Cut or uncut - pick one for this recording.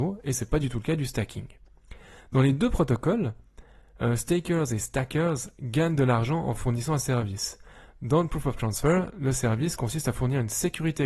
uncut